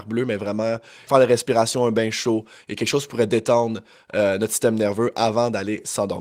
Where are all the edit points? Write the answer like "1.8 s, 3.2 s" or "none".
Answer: 1.1 s